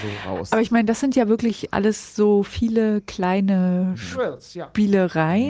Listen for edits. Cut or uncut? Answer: uncut